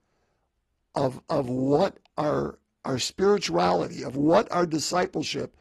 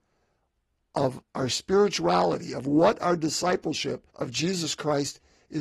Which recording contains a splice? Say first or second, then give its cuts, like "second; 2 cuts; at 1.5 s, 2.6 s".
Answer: second; 2 cuts; at 1.2 s, 4.1 s